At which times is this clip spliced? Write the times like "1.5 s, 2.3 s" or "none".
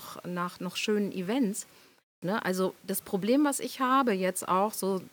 2.2 s